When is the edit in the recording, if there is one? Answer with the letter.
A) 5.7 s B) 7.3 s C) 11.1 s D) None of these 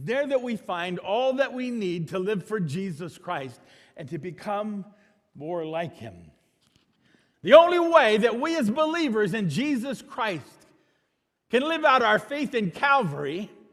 B